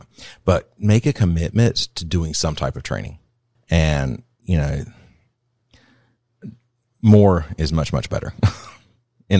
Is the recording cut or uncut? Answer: cut